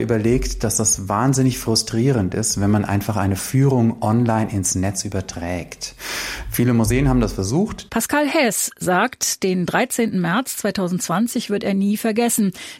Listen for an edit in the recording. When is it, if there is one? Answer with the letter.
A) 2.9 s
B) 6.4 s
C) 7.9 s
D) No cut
C